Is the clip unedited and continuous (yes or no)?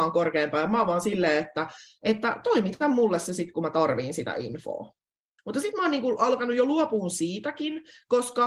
no